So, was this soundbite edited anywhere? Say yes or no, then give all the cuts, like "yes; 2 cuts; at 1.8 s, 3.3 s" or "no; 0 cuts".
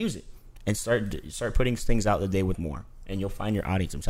yes; 1 cut; at 2.5 s